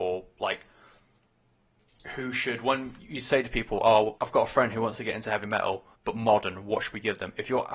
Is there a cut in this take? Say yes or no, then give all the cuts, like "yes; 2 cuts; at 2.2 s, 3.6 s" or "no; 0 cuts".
yes; 2 cuts; at 4.2 s, 5.9 s